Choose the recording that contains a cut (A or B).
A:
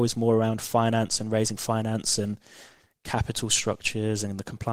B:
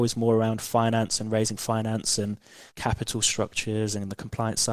B